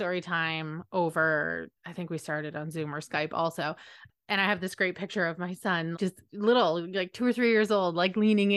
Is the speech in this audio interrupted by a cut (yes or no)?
yes